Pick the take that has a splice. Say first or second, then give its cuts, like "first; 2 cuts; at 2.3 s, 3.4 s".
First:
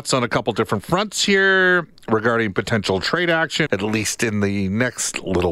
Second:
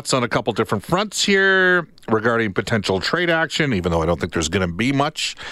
first; 1 cut; at 3.7 s